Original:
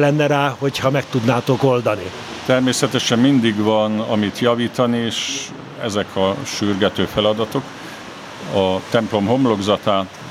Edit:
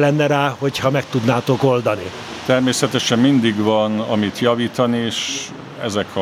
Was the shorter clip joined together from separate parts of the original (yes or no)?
no